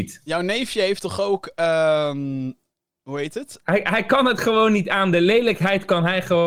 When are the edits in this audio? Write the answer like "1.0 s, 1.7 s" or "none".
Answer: 3.6 s

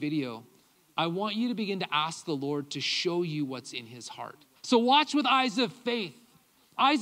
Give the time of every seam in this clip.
4.6 s

